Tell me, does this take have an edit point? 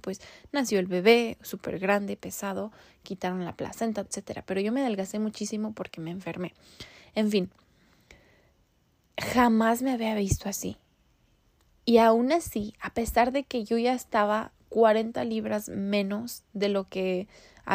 yes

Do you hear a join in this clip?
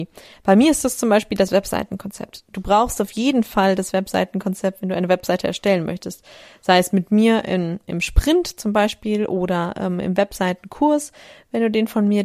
no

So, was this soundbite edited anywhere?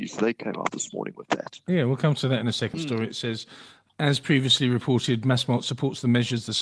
yes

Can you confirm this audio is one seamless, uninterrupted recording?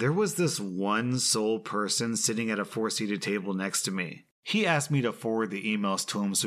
no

